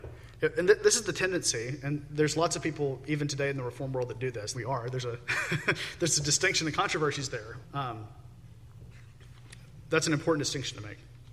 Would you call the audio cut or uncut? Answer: cut